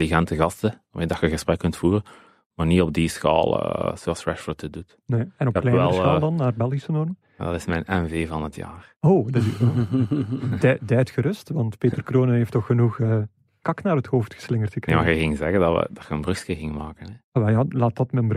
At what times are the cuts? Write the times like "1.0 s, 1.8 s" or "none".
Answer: 7.2 s